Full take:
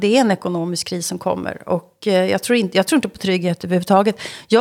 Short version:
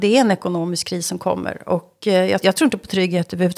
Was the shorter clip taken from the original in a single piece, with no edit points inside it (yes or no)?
no